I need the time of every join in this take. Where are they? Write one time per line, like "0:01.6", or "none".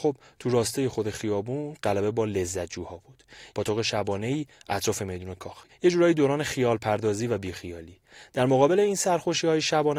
0:03.5
0:05.7